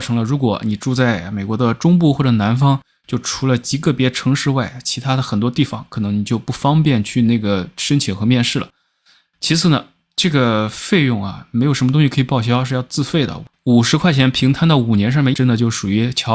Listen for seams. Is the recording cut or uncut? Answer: cut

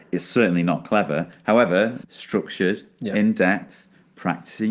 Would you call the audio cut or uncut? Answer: cut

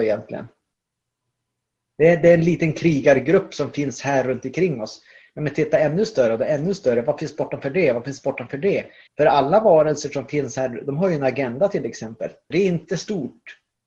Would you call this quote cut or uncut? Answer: cut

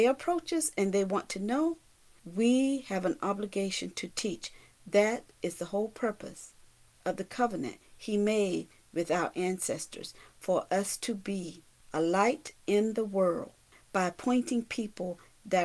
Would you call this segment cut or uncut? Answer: uncut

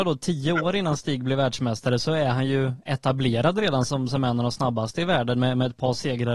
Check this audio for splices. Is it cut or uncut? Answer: uncut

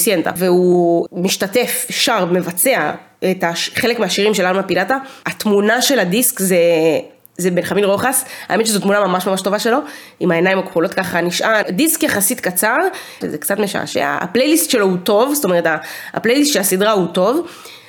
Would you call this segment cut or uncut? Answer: cut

